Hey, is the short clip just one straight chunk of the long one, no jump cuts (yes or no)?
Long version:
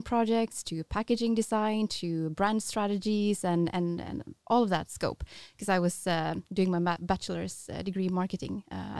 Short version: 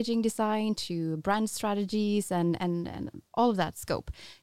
yes